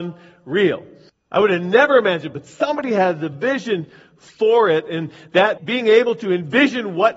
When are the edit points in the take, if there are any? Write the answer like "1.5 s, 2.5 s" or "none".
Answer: 1.1 s, 5.6 s